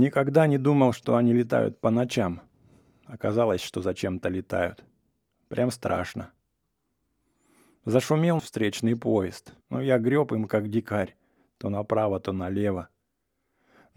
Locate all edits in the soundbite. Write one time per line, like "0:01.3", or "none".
0:08.4
0:09.6